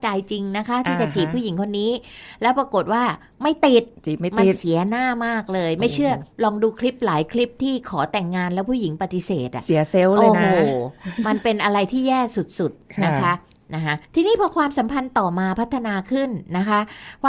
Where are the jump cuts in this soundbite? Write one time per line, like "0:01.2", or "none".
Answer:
0:04.0
0:14.1